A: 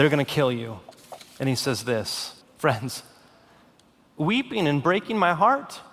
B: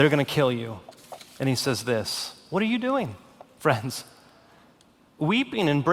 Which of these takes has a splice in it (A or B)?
A